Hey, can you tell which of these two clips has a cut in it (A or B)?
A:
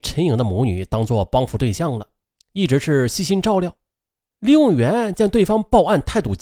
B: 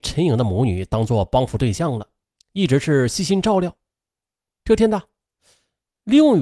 A